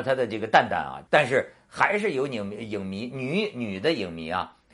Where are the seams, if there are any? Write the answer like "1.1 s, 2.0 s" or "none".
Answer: 1.1 s